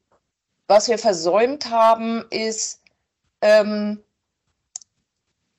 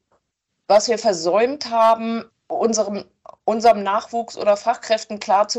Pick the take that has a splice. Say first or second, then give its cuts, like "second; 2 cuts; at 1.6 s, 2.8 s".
second; 1 cut; at 2.3 s